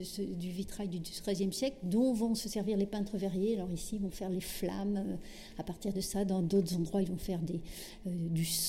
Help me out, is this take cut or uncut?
uncut